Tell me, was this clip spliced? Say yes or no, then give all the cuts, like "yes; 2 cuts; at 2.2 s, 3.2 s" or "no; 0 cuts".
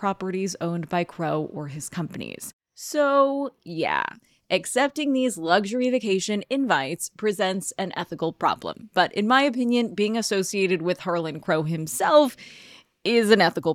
no; 0 cuts